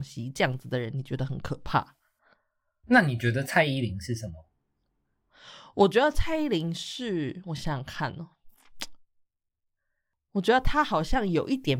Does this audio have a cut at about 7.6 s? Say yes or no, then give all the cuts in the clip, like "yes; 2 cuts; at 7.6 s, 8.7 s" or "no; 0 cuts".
no; 0 cuts